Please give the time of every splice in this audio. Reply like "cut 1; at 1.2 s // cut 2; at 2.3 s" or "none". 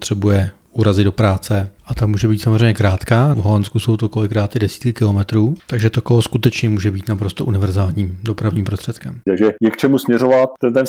cut 1; at 1.8 s // cut 2; at 3.3 s // cut 3; at 9.3 s